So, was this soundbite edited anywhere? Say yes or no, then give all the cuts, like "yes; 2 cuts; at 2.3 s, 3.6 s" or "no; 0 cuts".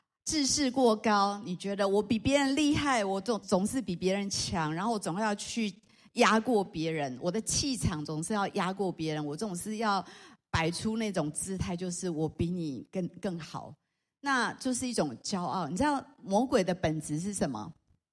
yes; 1 cut; at 3.4 s